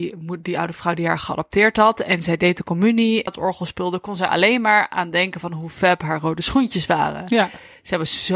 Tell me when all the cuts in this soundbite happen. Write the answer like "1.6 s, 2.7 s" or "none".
3.3 s